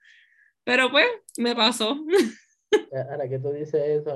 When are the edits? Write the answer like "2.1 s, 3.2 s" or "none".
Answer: none

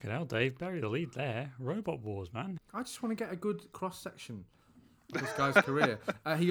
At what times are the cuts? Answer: 2.6 s

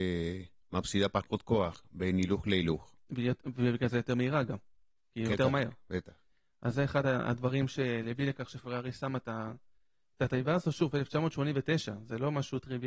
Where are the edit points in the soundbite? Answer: 5.3 s

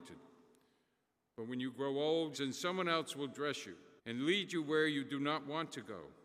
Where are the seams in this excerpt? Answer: 2.3 s, 4.0 s

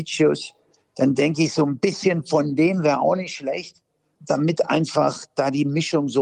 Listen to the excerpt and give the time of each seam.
4.1 s

